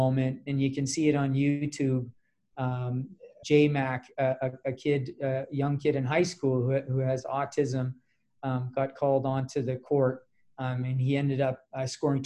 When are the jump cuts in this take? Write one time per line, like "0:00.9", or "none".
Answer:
0:03.4